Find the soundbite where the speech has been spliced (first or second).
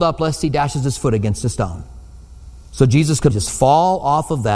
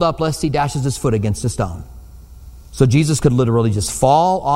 first